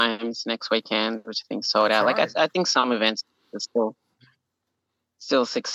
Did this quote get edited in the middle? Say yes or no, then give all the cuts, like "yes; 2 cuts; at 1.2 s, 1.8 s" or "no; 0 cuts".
no; 0 cuts